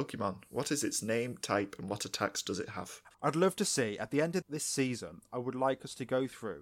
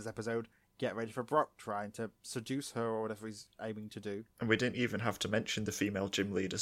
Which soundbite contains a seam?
first; 2 cuts; at 3.1 s, 4.4 s

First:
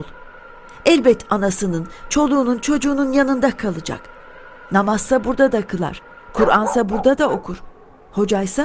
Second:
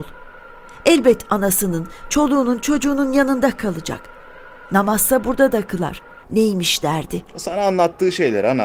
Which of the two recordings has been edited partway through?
second; 1 cut; at 6.2 s

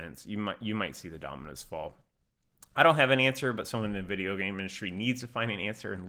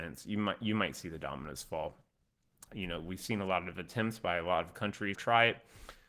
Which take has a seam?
second; 2 cuts; at 2.7 s, 5.1 s

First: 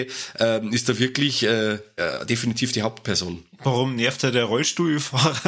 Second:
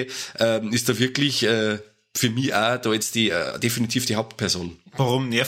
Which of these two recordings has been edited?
first; 1 cut; at 2.0 s

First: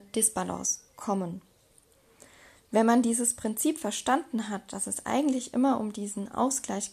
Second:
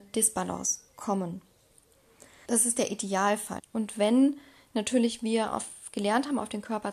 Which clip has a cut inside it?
second; 2 cuts; at 2.4 s, 3.6 s

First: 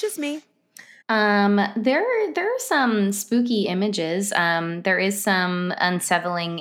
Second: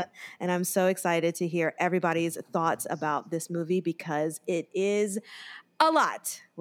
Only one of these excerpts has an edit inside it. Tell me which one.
first; 1 cut; at 1.0 s

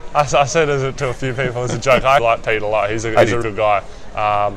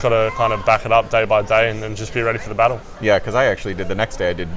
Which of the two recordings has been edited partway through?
first; 2 cuts; at 2.2 s, 3.4 s

